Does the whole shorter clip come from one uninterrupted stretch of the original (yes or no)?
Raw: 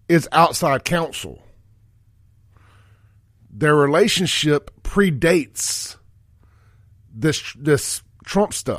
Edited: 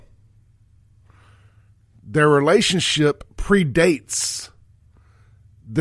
yes